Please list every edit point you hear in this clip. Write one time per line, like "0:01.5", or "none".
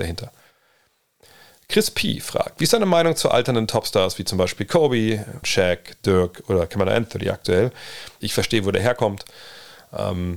0:05.4
0:08.2